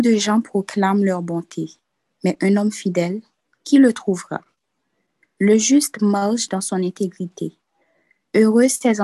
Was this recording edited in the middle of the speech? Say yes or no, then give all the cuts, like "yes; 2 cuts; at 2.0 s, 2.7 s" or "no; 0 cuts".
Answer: no; 0 cuts